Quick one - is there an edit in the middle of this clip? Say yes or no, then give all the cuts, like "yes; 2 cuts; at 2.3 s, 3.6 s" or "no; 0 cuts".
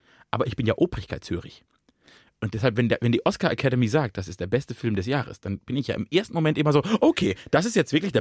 no; 0 cuts